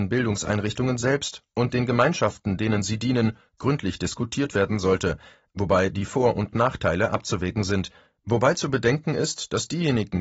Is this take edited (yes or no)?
no